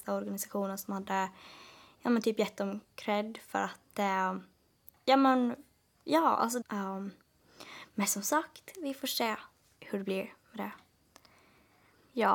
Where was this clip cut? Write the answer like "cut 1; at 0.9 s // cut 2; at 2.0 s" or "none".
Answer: cut 1; at 6.6 s // cut 2; at 9.6 s